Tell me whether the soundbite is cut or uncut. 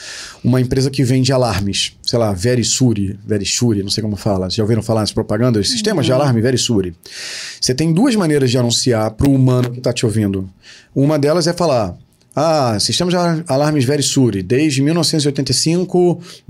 uncut